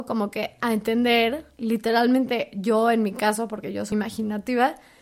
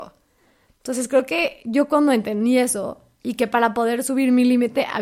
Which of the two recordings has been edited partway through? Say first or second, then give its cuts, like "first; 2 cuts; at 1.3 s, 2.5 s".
first; 1 cut; at 3.9 s